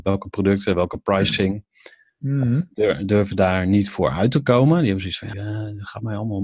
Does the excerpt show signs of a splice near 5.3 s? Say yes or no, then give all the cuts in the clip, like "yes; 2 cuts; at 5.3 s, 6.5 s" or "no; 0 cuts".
yes; 2 cuts; at 2.1 s, 5.3 s